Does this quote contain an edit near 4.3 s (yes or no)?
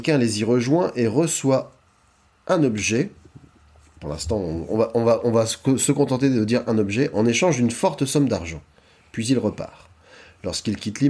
no